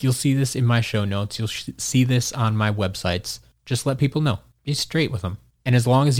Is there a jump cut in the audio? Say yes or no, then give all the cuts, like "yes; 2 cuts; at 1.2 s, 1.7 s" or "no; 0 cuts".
no; 0 cuts